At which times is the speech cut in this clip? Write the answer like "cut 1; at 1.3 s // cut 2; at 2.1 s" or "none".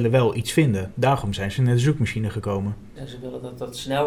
cut 1; at 3.0 s